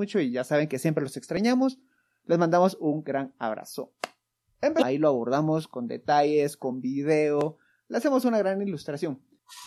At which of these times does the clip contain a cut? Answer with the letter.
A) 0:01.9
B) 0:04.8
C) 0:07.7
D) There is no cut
B